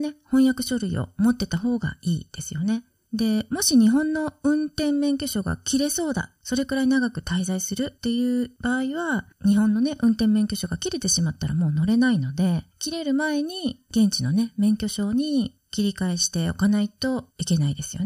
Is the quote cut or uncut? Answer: uncut